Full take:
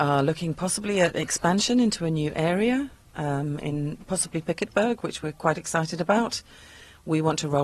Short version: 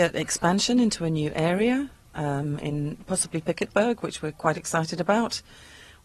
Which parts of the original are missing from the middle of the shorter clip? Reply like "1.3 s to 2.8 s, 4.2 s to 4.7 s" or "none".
none